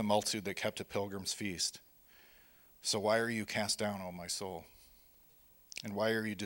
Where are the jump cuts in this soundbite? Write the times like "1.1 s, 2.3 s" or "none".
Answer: none